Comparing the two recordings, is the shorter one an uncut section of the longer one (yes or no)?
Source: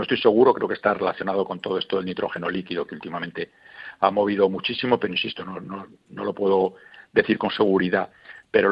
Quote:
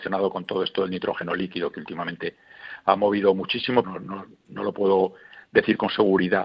no